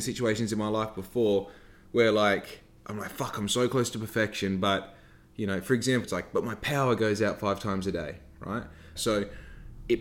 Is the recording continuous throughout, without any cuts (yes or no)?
no